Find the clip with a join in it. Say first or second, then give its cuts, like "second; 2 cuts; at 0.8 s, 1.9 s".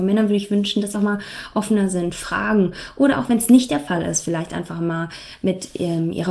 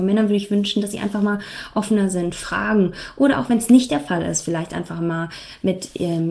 first; 1 cut; at 0.9 s